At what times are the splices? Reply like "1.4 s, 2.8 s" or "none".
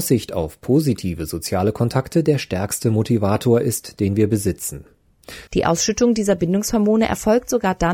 5.5 s